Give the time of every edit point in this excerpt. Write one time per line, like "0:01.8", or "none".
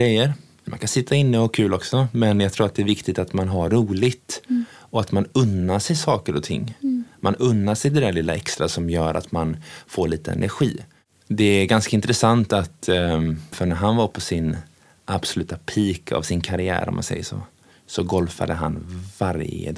0:13.5
0:17.7